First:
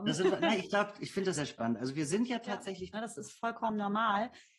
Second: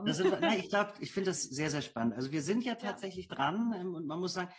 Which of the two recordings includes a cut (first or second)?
first